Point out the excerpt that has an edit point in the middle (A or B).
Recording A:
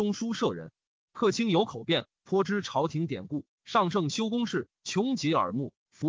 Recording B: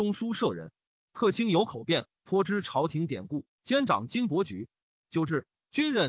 A